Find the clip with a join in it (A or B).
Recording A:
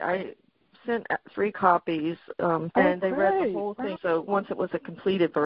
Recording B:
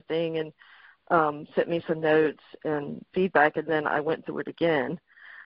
A